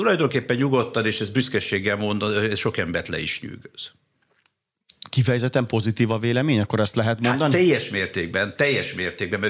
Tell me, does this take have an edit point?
no; 0 cuts

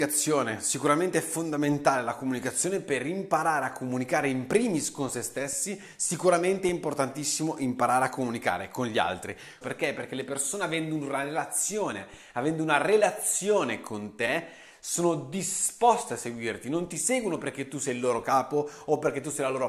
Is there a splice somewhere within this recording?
yes; 1 cut; at 9.6 s

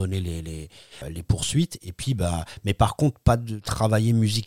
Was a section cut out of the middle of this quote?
yes; 1 cut; at 1.0 s

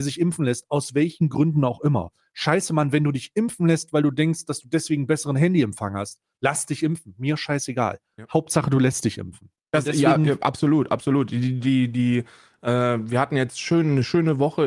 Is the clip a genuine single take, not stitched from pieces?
no; 1 cut; at 9.6 s

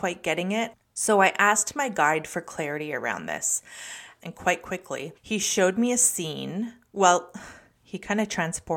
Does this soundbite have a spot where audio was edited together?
yes; 1 cut; at 4.2 s

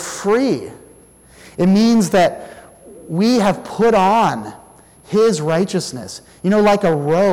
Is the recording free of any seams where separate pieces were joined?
yes; 0 cuts

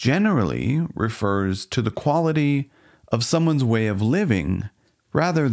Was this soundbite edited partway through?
no; 0 cuts

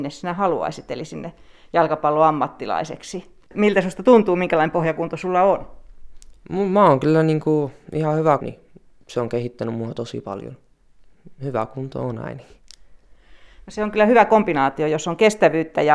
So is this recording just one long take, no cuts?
no; 2 cuts; at 3.5 s, 8.4 s

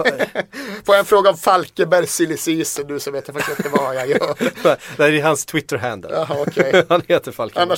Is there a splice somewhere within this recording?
no; 0 cuts

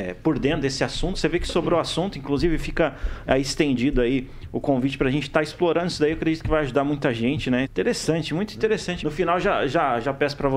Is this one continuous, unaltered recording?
no; 2 cuts; at 7.6 s, 9.0 s

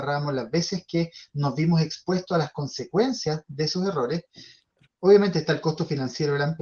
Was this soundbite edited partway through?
yes; 1 cut; at 4.8 s

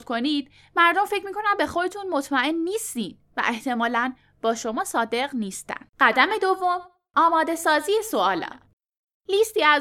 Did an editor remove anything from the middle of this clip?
yes; 1 cut; at 5.9 s

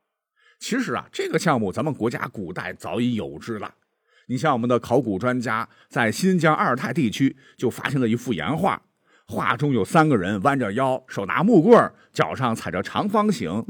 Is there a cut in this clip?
no; 0 cuts

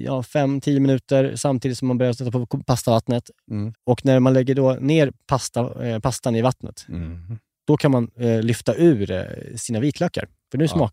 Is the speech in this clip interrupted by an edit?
yes; 1 cut; at 3.7 s

